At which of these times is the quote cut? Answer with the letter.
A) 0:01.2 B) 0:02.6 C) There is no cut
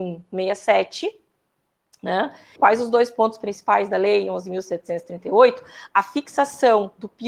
B